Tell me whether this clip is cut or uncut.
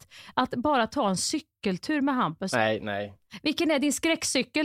uncut